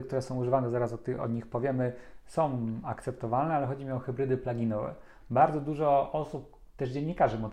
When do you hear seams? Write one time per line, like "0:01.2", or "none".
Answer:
none